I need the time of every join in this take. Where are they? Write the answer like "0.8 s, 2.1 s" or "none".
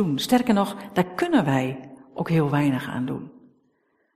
none